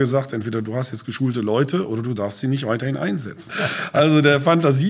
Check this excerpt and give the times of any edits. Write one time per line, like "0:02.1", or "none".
0:03.5